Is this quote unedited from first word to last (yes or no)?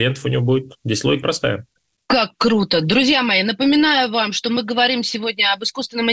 no